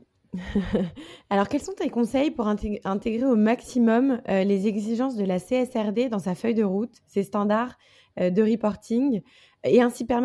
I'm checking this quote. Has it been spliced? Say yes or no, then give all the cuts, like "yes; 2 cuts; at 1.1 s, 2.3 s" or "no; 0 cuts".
no; 0 cuts